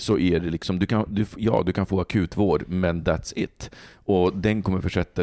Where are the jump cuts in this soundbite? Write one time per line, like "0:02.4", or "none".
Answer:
none